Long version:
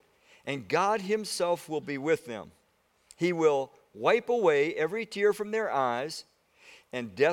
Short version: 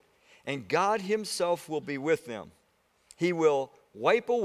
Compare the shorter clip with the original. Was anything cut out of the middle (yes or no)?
no